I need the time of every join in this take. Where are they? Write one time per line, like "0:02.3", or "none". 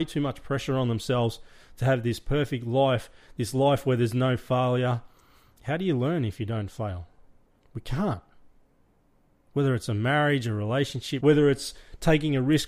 0:07.6
0:11.2